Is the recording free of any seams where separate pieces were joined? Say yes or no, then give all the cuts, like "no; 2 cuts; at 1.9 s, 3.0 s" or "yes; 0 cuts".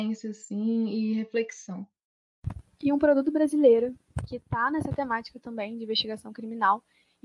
yes; 0 cuts